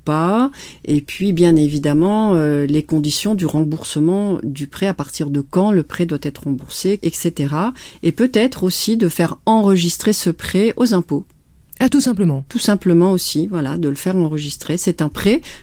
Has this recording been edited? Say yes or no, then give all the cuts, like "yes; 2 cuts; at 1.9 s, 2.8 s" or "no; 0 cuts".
yes; 1 cut; at 7.0 s